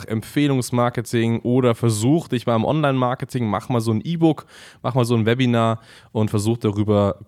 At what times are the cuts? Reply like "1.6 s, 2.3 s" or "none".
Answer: none

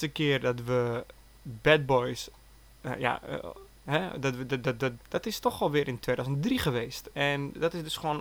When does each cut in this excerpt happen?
3.9 s, 5.0 s

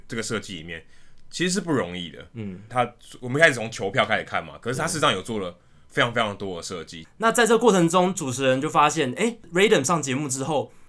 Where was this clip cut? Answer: 2.7 s, 7.0 s

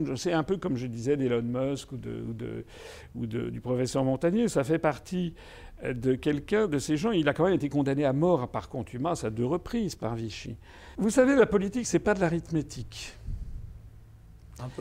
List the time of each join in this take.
11.0 s

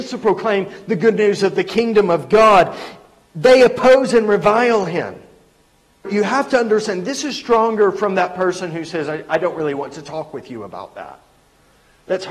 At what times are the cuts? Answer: 6.0 s

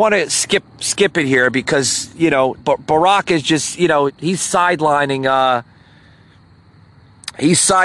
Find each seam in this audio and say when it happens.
2.6 s, 4.1 s

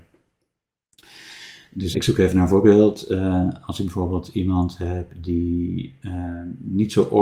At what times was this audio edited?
1.9 s

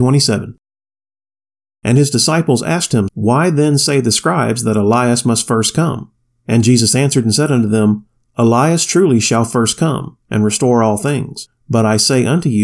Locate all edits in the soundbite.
3.1 s

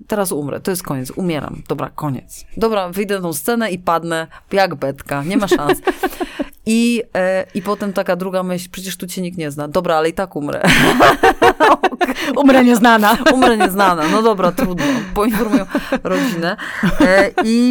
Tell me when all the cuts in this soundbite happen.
none

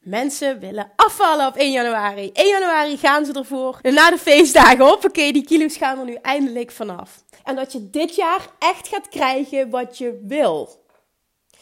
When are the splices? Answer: 3.8 s, 7.4 s

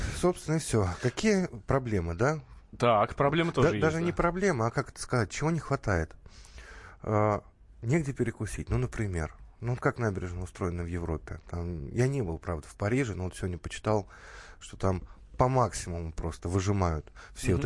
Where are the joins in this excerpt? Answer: none

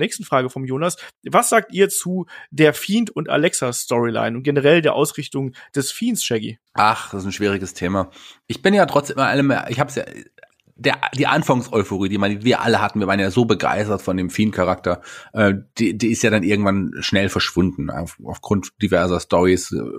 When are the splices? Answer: 6.7 s, 8.4 s

